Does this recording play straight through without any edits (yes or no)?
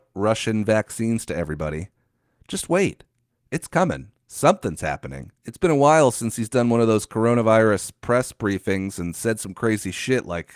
no